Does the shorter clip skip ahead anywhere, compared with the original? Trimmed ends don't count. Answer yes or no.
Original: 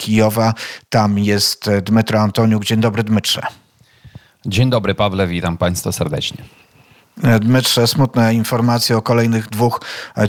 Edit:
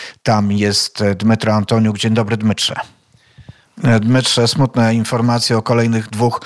yes